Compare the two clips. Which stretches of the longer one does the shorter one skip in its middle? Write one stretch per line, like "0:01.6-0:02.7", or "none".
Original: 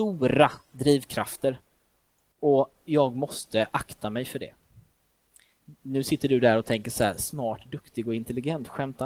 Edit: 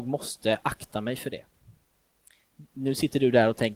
none